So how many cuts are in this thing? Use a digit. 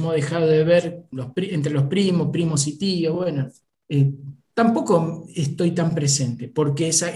0